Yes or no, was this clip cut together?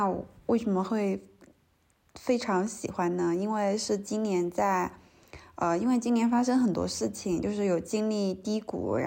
no